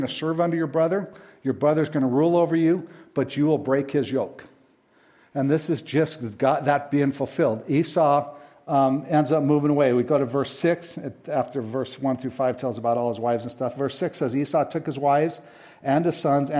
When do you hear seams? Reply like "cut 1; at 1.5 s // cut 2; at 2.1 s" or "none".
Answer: none